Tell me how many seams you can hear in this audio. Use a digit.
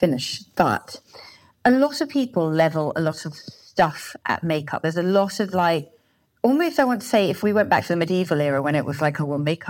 0